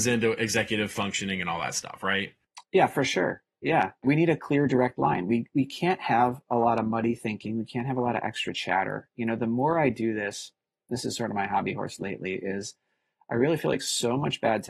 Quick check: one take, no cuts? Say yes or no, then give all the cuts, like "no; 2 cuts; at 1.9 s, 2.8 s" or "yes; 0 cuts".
yes; 0 cuts